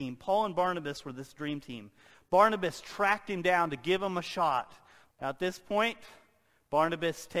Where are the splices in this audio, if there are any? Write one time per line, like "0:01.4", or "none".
0:02.1
0:05.1